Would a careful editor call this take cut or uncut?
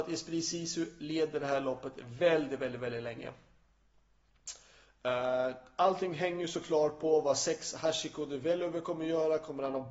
uncut